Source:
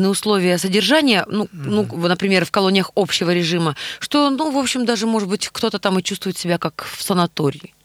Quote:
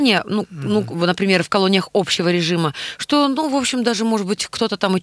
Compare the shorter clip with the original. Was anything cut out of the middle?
no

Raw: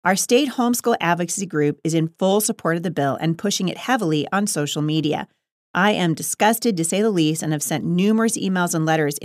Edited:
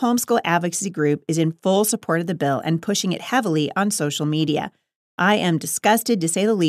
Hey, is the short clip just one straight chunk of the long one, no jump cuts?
yes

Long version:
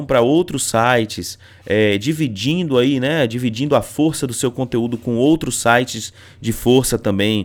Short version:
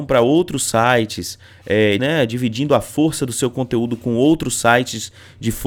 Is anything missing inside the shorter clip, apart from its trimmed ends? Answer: yes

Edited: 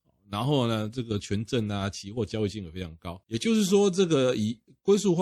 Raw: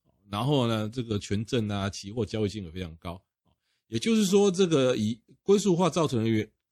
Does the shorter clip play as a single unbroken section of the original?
no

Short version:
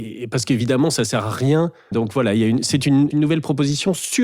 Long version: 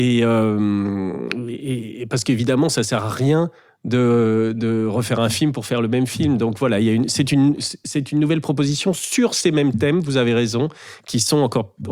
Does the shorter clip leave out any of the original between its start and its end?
yes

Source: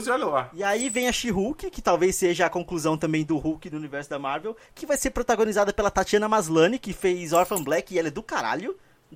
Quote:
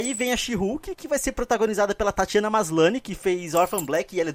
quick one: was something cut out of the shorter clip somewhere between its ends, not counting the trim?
yes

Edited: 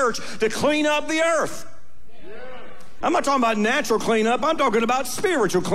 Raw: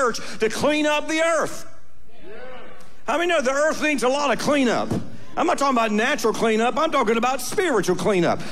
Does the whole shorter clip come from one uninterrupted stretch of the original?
no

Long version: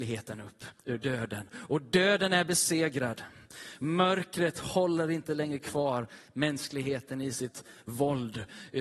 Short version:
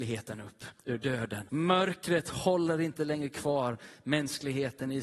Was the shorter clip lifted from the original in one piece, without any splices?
no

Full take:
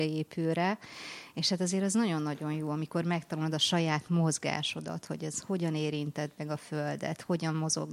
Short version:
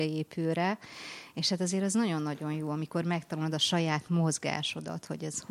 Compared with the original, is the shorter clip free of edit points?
yes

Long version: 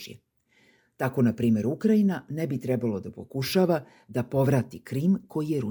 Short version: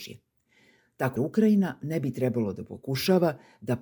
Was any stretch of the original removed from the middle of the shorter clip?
yes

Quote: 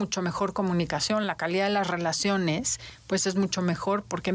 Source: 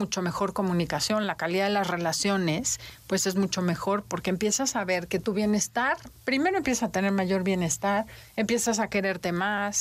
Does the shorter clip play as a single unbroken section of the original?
yes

